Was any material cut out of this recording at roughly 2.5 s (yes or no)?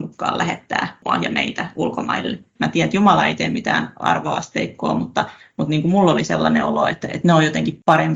yes